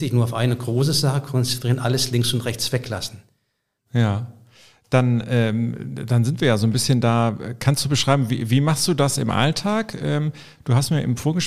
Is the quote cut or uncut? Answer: cut